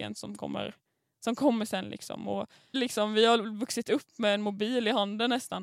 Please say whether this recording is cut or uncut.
cut